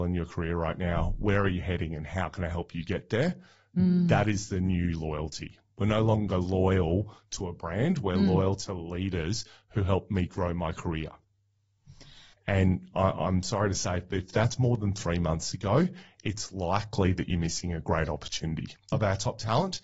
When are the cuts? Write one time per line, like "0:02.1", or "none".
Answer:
0:12.3
0:18.9

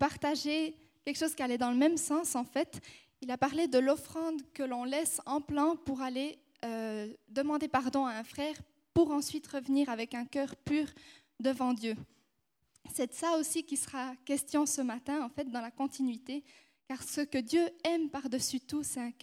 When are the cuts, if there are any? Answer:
none

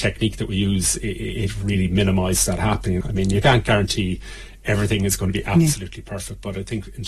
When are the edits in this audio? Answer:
0:03.0

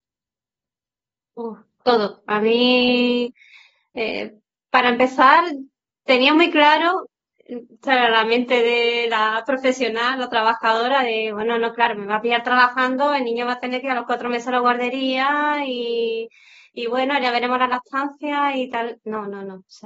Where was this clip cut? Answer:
none

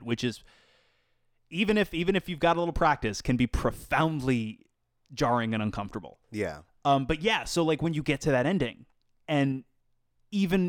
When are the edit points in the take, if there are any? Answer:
none

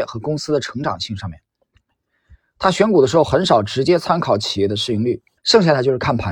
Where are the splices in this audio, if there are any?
0:05.4

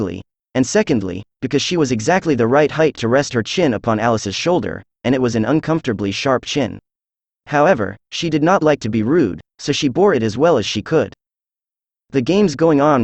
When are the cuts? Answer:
none

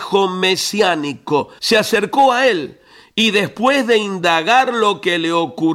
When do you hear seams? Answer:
0:01.6

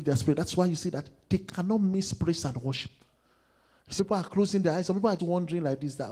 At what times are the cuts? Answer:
0:04.0
0:05.2

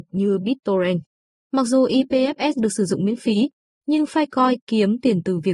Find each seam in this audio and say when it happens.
0:01.3

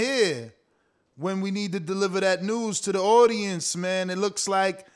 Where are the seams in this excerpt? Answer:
none

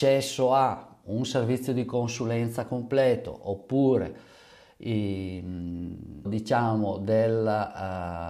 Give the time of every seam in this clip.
0:06.3

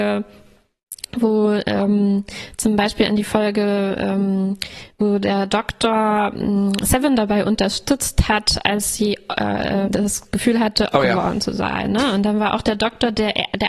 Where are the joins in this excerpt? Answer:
0:09.8
0:10.9

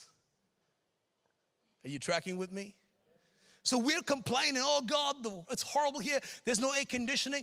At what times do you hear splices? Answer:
0:05.4

